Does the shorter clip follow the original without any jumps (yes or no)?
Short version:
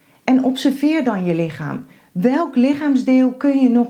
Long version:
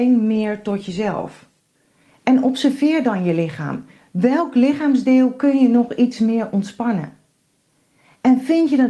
yes